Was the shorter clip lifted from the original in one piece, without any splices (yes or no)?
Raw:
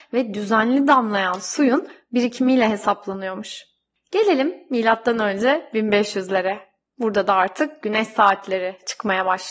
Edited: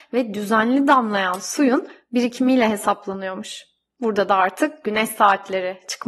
no